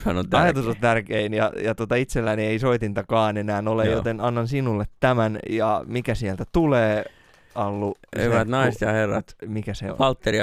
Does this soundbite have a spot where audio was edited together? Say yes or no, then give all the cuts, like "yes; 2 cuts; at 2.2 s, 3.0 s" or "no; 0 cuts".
no; 0 cuts